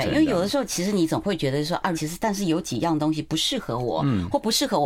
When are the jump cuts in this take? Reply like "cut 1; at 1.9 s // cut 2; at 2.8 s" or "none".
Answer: cut 1; at 1.9 s

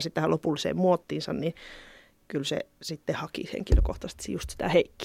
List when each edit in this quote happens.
none

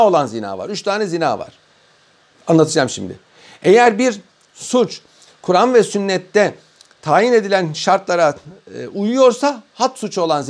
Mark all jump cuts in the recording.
none

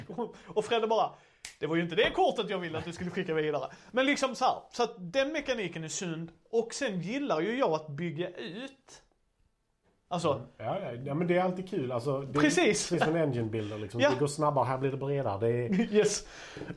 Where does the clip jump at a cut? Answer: none

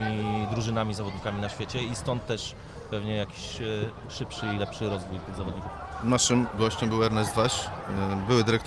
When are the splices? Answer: none

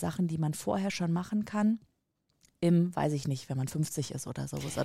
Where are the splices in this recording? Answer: none

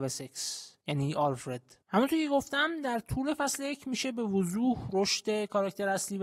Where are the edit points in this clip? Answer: cut 1; at 1.8 s

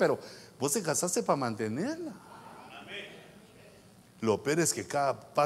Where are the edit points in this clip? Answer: none

